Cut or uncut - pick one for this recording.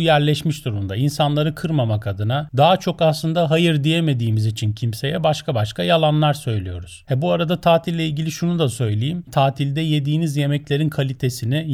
uncut